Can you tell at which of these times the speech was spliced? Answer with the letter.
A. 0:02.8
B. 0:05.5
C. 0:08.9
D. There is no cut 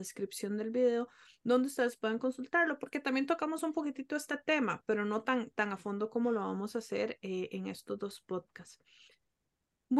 D